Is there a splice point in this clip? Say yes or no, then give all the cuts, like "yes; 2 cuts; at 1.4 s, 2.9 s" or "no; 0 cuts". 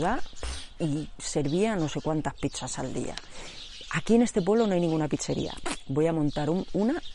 no; 0 cuts